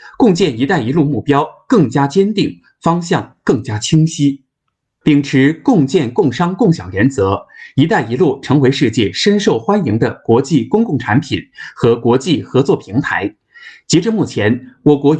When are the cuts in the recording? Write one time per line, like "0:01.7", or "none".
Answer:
none